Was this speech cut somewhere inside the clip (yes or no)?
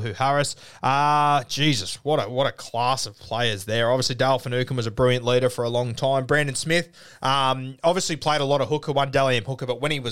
no